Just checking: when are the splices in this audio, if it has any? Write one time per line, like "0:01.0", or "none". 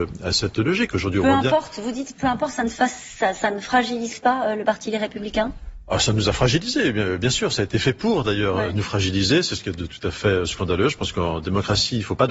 none